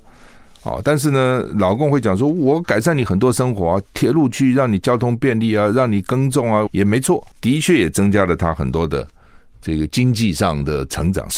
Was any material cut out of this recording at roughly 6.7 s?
yes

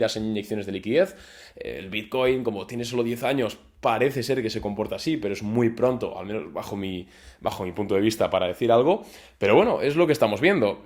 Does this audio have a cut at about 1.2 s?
no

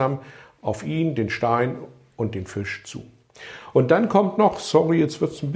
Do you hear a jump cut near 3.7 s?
yes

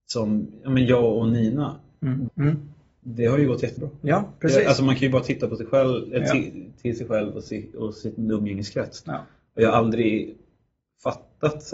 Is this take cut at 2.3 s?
yes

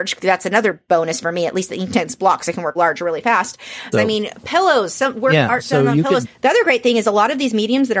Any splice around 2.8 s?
yes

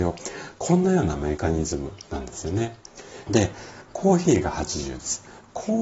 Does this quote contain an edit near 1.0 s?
no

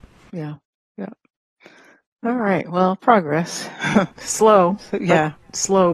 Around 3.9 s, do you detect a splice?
no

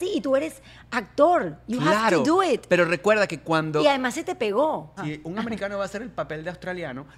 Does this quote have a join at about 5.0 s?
yes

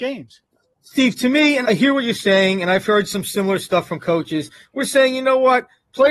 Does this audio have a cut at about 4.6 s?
yes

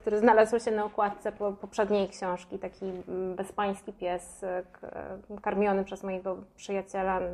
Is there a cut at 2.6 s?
no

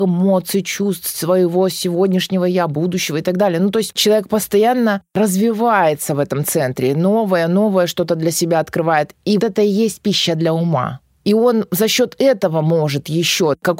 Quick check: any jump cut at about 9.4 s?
yes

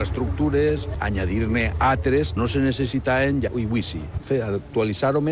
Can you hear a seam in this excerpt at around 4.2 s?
yes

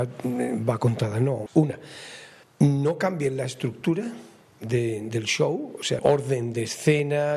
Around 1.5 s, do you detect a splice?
yes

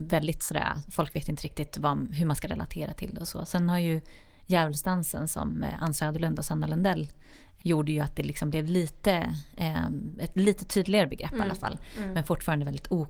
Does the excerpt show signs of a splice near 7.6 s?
yes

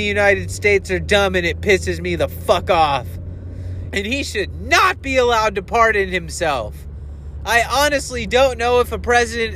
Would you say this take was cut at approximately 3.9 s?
yes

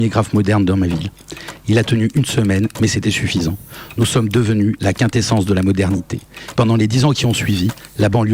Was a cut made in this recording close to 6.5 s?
yes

